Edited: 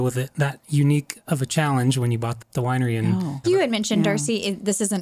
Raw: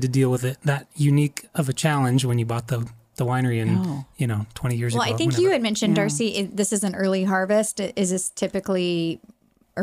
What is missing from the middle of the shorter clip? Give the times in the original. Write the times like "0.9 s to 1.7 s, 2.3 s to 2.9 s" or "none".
2.7 s to 3.0 s, 4.1 s to 5.4 s